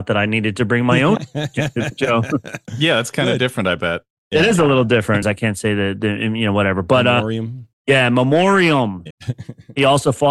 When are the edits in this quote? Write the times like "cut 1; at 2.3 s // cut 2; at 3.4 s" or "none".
cut 1; at 5.2 s // cut 2; at 9.1 s